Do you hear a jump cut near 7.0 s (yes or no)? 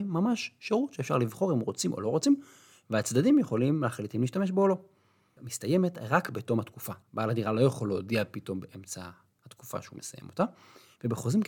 yes